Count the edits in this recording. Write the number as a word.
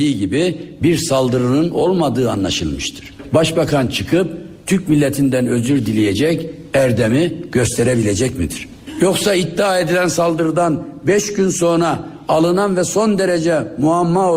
zero